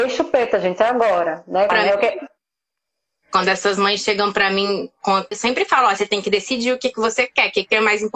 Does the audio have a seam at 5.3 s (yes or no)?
yes